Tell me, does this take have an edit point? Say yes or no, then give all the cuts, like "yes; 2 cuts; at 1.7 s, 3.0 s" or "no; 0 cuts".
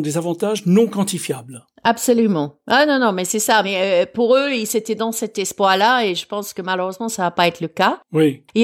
no; 0 cuts